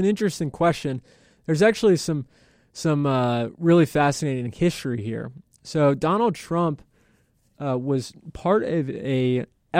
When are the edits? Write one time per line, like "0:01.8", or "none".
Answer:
none